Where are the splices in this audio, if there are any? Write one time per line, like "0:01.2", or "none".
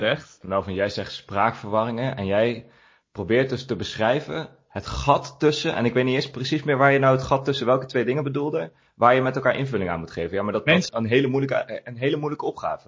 0:10.9